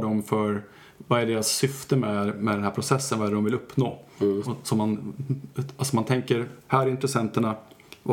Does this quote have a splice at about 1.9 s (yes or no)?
no